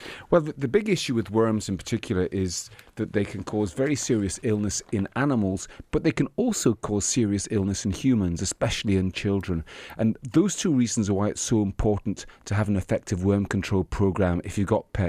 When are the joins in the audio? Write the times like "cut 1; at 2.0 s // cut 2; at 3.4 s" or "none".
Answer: none